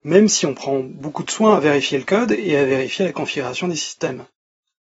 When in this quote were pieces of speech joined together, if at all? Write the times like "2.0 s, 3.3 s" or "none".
none